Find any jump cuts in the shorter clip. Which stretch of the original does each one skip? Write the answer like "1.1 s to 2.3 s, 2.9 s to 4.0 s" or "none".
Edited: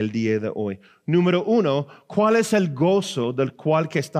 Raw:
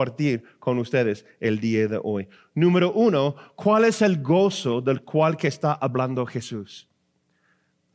none